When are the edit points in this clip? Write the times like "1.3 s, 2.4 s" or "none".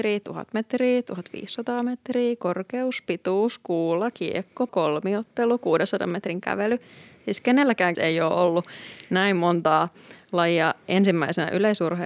4.7 s, 7.9 s